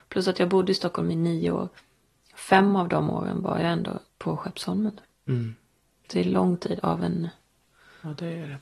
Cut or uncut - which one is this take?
cut